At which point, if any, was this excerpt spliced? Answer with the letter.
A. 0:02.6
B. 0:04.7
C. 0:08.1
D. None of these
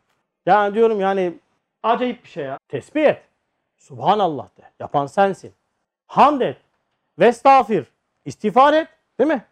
A